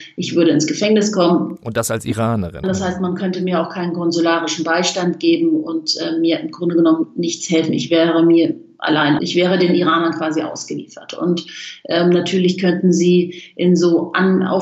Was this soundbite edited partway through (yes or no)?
yes